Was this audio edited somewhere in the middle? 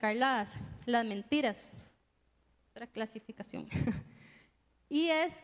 no; 0 cuts

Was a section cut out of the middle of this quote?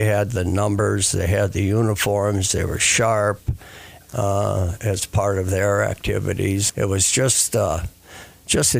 yes; 2 cuts; at 4.0 s, 6.7 s

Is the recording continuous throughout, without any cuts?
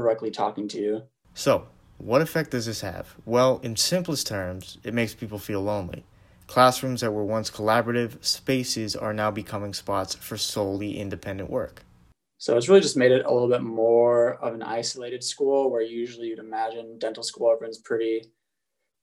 yes; 0 cuts

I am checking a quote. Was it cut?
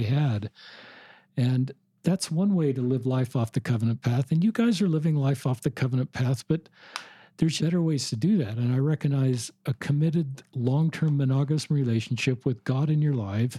yes; 1 cut; at 7.6 s

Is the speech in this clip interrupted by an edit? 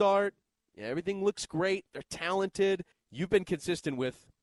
yes; 1 cut; at 2.9 s

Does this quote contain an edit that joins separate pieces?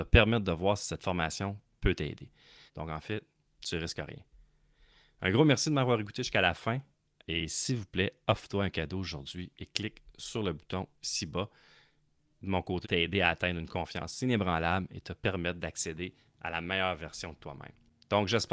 yes; 2 cuts; at 2.7 s, 12.8 s

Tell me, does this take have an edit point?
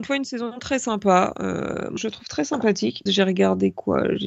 yes; 2 cuts; at 2.0 s, 3.1 s

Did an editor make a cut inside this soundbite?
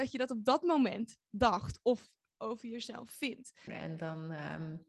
yes; 1 cut; at 3.7 s

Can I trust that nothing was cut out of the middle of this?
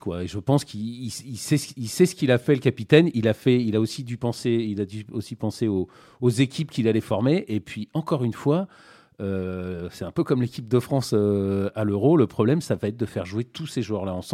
yes; 0 cuts

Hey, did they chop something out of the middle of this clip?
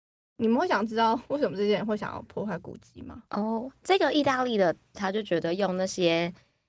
yes; 2 cuts; at 3.3 s, 4.9 s

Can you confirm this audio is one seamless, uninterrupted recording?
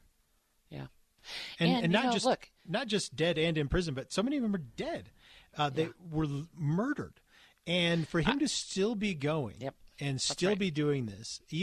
yes; 0 cuts

